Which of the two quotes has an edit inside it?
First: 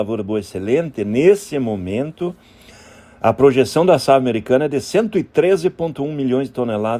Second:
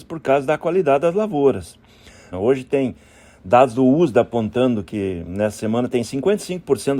second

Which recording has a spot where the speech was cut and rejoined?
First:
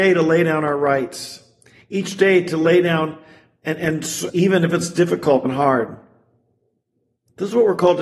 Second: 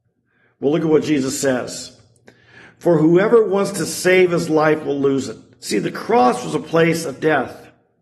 first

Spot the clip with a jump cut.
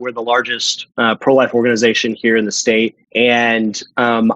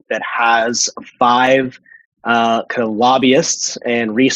first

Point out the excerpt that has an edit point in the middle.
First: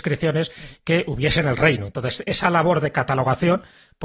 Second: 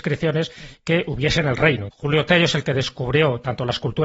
second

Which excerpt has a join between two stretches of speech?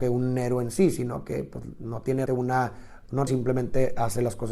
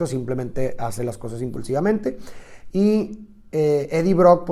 first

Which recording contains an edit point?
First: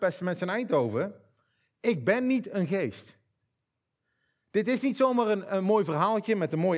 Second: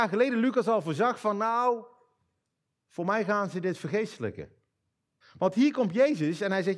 second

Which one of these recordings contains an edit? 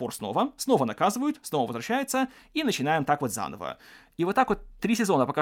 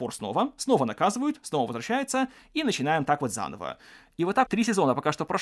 second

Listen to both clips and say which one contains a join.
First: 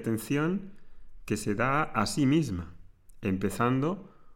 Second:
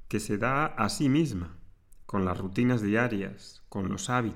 second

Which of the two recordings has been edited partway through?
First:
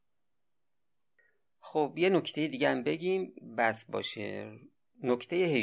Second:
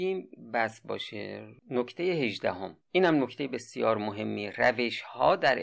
second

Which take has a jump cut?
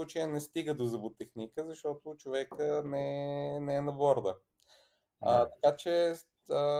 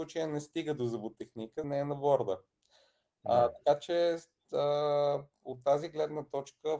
second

